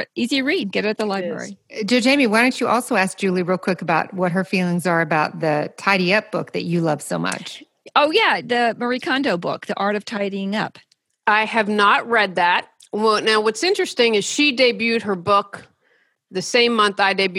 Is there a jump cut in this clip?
no; 0 cuts

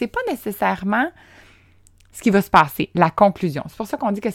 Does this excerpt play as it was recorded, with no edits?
yes; 0 cuts

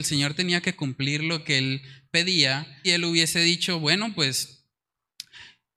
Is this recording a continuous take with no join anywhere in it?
no; 1 cut; at 2.8 s

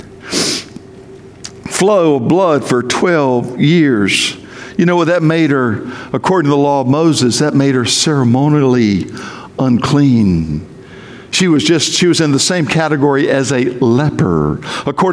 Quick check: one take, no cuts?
yes; 0 cuts

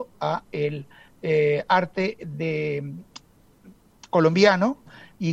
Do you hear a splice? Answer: no; 0 cuts

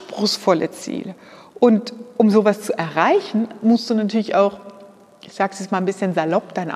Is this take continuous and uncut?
yes; 0 cuts

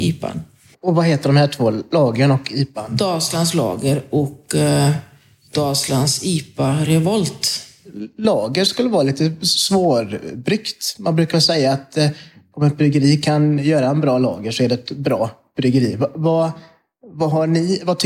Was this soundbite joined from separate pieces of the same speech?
no; 0 cuts

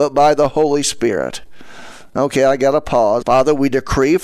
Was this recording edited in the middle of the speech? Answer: yes; 1 cut; at 3.2 s

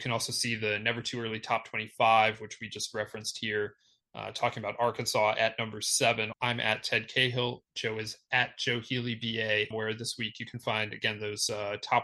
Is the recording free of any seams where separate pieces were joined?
no; 2 cuts; at 6.3 s, 9.7 s

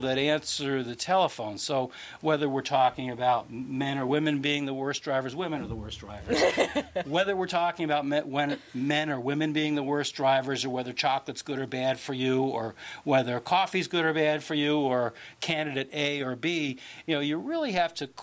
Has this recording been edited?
no; 0 cuts

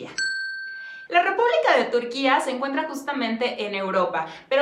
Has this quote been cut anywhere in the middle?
yes; 1 cut; at 1.1 s

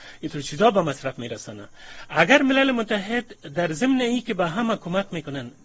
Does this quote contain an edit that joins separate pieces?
no; 0 cuts

